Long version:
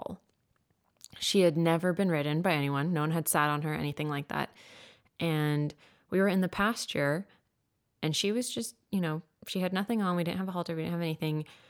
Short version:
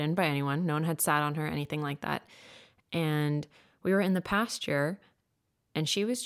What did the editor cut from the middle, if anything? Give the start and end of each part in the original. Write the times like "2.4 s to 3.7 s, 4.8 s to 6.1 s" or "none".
none